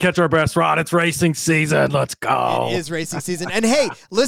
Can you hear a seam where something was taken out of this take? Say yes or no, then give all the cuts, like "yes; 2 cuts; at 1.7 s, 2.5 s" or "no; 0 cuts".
no; 0 cuts